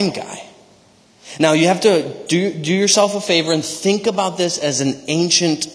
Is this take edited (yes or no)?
no